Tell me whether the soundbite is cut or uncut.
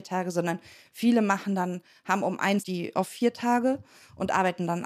cut